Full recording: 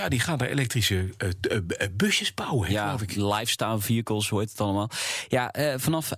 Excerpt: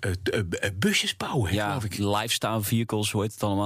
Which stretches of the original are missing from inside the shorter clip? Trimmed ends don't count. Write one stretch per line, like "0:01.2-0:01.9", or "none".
none